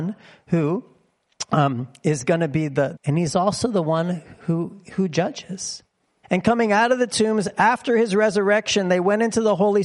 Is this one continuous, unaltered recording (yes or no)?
no